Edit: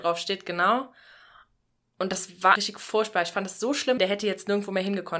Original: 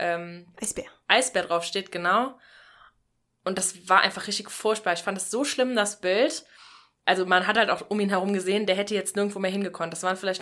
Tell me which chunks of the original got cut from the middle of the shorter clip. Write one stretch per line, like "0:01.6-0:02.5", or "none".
0:04.0-0:04.3
0:05.7-0:08.7